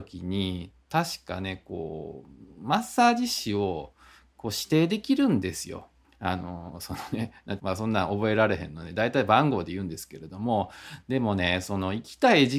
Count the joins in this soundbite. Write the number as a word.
two